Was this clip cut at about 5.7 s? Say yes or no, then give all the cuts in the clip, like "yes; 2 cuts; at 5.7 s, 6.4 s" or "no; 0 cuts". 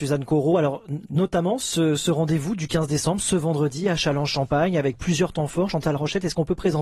no; 0 cuts